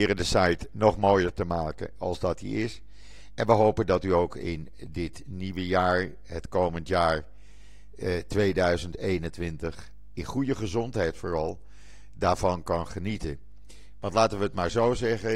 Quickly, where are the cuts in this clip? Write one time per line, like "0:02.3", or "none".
none